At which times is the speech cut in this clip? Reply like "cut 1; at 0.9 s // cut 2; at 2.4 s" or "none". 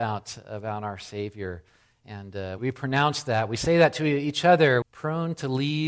cut 1; at 2.6 s // cut 2; at 4.8 s